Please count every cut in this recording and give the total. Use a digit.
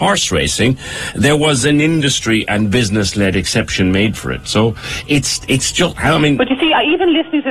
0